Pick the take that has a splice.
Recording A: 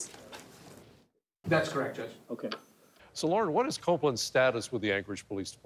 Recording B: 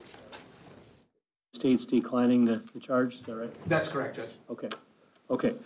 A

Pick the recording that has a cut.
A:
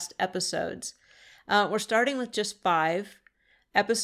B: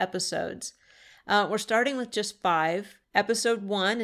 B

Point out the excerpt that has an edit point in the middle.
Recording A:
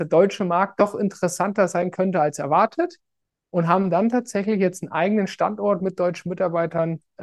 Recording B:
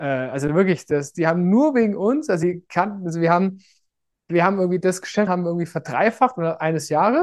B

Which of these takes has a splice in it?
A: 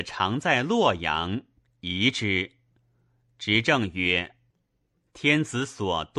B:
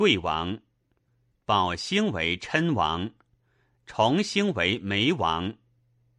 B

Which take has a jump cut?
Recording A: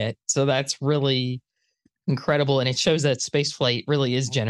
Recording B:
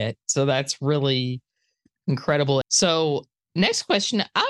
B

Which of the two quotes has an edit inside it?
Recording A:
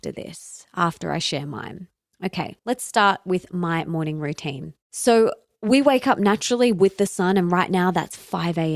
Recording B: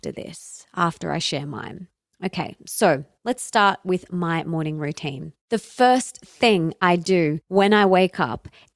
A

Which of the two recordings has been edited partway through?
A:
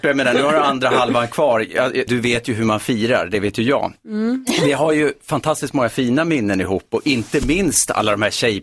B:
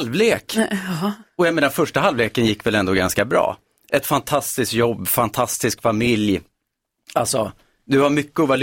A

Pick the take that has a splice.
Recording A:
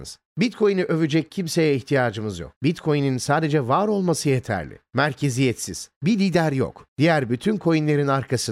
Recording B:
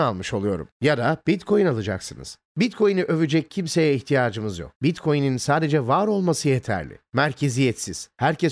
A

